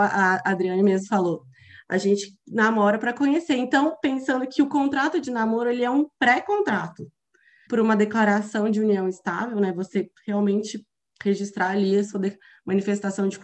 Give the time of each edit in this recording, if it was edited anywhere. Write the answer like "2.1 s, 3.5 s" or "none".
7.7 s

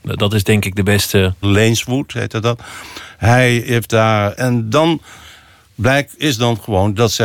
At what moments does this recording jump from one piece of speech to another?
1.4 s, 4.3 s

